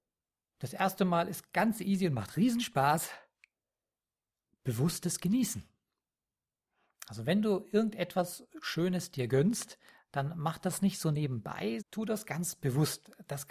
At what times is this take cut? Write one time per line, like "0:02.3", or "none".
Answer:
0:11.8